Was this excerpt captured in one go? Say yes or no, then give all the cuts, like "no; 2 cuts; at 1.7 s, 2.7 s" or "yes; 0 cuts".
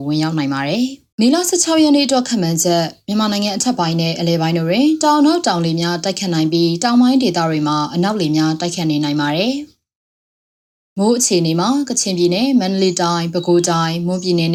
no; 1 cut; at 1.1 s